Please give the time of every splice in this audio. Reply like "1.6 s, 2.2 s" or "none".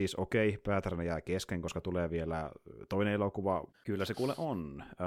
3.7 s